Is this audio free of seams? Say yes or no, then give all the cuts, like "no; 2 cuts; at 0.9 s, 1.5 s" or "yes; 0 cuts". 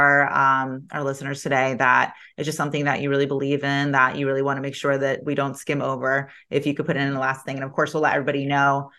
yes; 0 cuts